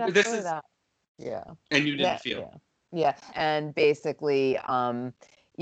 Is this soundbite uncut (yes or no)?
no